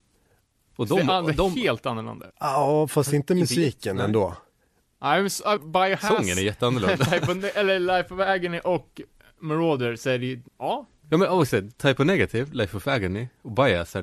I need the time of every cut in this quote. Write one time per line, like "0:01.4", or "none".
0:02.3
0:05.6
0:10.5